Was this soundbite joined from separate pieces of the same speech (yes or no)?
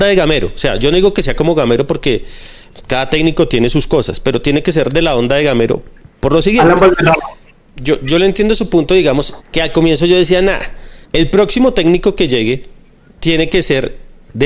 yes